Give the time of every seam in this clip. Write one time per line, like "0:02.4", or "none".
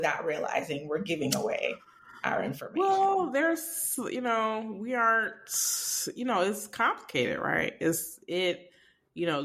none